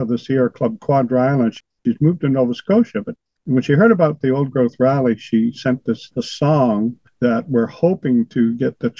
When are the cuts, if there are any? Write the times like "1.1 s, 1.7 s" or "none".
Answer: none

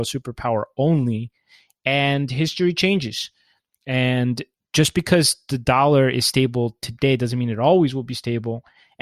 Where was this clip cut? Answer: none

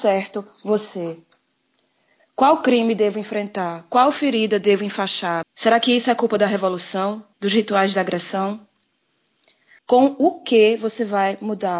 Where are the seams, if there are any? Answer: 5.4 s, 7.3 s, 9.8 s

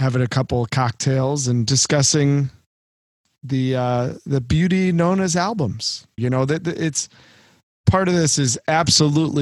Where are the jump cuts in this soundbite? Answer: 6.2 s

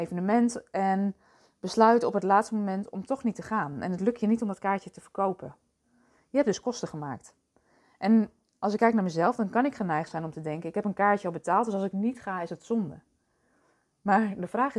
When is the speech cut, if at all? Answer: none

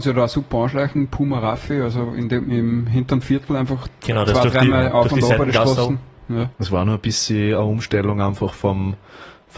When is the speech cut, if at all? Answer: 6.5 s

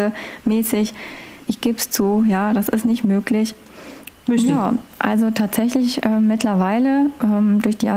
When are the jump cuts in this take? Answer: 1.5 s, 4.1 s

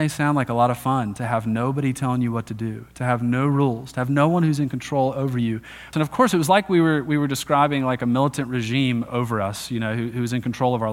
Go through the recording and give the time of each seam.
5.9 s

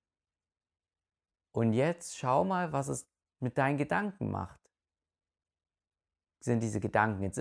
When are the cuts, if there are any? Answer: none

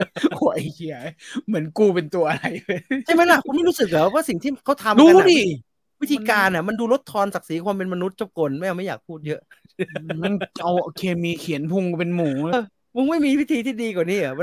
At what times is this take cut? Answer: 12.5 s

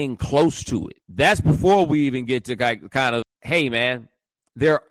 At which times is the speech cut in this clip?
1.0 s, 3.2 s

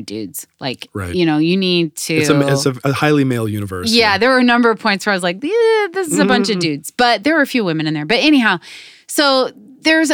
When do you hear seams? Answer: none

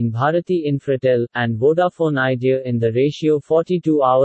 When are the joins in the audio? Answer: 1.3 s

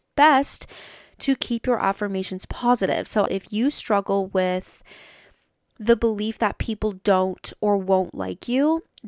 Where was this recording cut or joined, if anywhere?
3.3 s

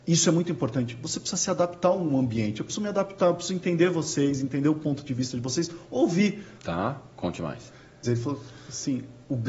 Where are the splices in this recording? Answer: 6.6 s, 8.0 s

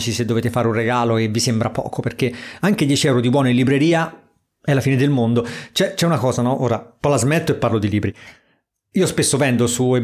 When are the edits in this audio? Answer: none

